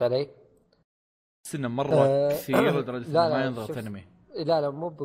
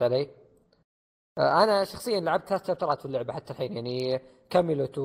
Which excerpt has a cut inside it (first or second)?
first